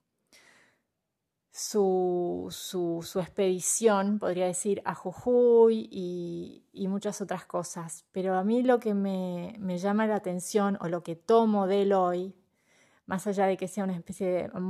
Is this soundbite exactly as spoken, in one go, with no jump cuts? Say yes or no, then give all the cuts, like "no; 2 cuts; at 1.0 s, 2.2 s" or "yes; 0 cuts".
yes; 0 cuts